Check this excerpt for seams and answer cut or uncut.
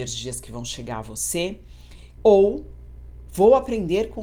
cut